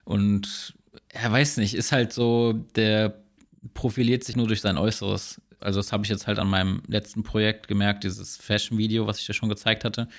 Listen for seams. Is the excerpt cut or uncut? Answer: cut